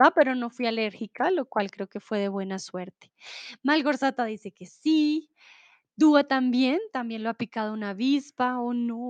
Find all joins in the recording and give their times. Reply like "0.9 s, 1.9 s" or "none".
none